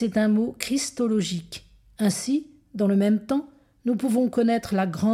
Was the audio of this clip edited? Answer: yes; 1 cut; at 1.9 s

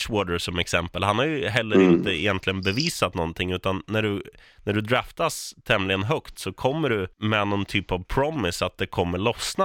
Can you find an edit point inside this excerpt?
yes; 1 cut; at 7.1 s

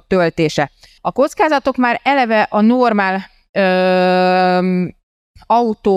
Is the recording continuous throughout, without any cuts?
no; 1 cut; at 1.0 s

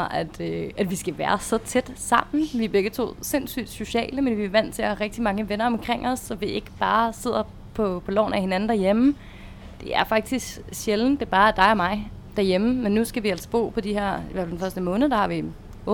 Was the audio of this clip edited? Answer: no; 0 cuts

